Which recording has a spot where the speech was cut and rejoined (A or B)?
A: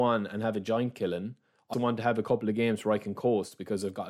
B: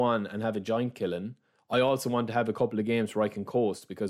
A